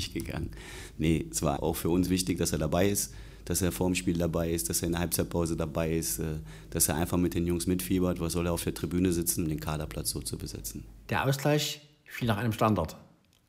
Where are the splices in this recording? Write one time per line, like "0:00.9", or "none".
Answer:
0:01.6
0:09.4